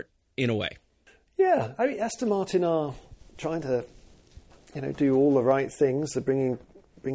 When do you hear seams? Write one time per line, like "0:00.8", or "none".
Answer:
none